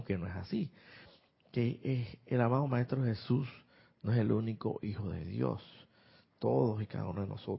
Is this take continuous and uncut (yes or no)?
yes